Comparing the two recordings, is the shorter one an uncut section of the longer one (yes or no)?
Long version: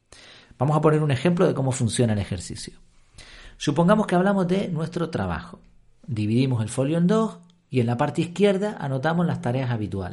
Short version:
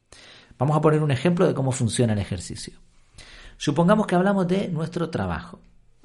yes